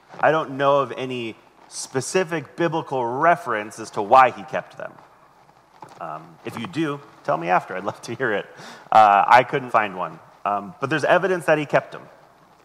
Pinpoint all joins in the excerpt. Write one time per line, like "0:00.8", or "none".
0:09.7